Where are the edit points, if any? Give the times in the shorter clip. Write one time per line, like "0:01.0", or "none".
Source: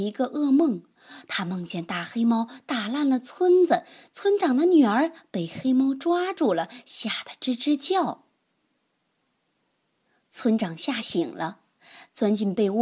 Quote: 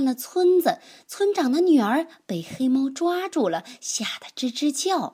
none